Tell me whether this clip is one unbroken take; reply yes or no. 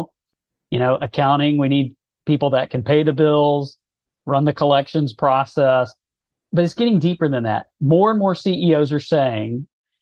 yes